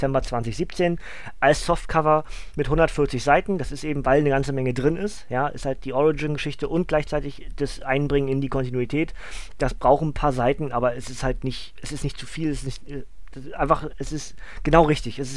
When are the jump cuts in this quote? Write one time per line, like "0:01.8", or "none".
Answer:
none